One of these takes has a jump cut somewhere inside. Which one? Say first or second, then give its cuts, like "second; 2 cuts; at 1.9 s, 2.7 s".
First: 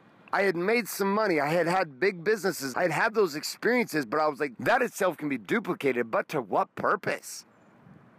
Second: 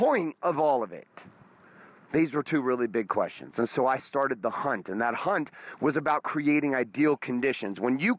first; 2 cuts; at 2.7 s, 4.5 s